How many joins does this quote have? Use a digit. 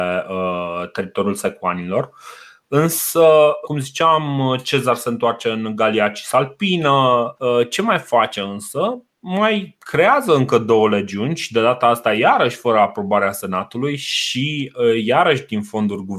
2